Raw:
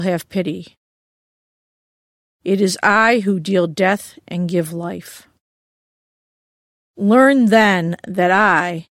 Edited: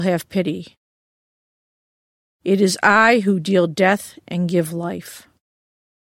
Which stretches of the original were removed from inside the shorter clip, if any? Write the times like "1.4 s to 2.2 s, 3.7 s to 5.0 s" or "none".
none